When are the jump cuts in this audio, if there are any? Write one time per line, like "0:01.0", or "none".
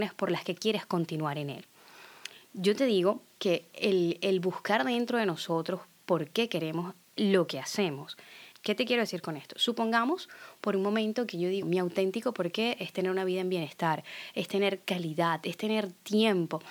0:08.5
0:11.6